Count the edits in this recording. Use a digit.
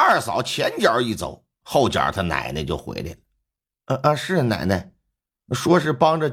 1